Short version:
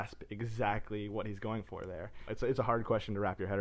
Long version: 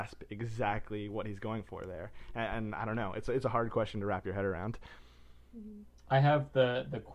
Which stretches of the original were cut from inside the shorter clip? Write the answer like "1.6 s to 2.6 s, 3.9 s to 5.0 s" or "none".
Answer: 2.3 s to 3.1 s